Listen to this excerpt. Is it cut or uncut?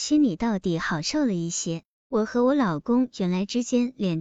uncut